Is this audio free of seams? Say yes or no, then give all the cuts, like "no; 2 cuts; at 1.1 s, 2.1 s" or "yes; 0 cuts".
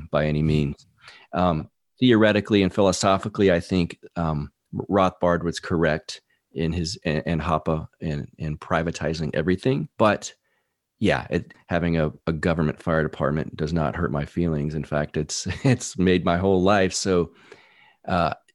no; 2 cuts; at 9.9 s, 11.5 s